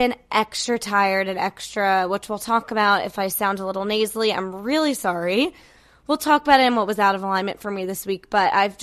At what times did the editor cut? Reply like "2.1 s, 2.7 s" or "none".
none